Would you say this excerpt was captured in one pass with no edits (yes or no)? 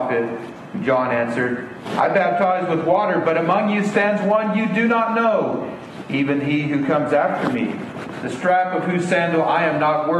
yes